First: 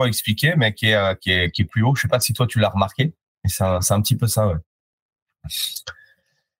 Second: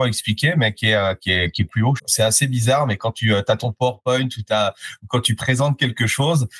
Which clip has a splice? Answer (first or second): second